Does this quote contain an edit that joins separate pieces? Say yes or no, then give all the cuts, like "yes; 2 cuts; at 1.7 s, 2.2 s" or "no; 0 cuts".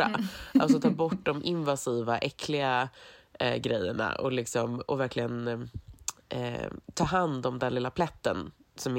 no; 0 cuts